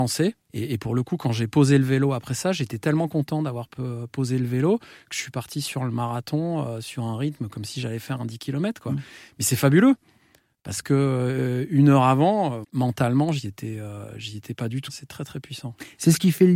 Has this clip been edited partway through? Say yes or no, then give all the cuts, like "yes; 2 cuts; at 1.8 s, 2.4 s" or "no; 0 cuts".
yes; 2 cuts; at 12.6 s, 14.9 s